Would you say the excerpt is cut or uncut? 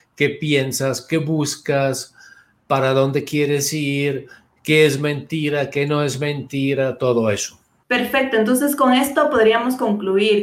uncut